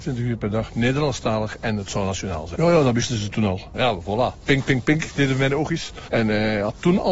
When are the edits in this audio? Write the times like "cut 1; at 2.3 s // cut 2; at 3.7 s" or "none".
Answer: cut 1; at 2.6 s // cut 2; at 3.7 s // cut 3; at 6.1 s

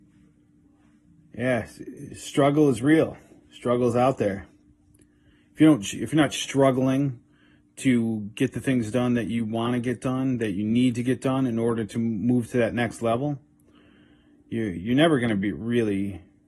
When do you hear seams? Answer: none

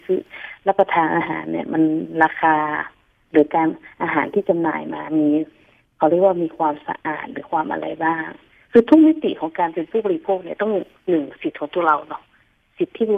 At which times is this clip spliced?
none

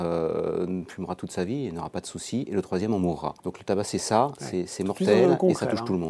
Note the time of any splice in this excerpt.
cut 1; at 3.4 s

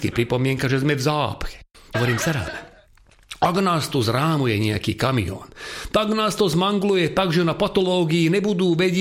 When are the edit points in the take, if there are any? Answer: cut 1; at 1.9 s

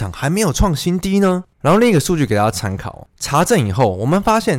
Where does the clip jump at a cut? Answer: cut 1; at 1.5 s

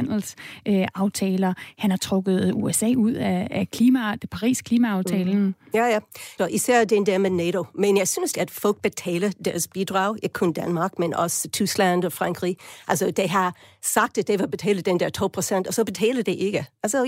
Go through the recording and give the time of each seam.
cut 1; at 6.4 s // cut 2; at 8.3 s

